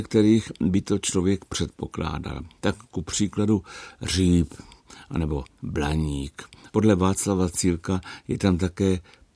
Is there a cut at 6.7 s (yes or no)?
yes